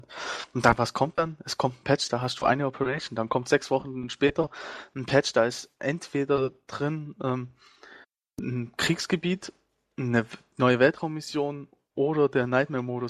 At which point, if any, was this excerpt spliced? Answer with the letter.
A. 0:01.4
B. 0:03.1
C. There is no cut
C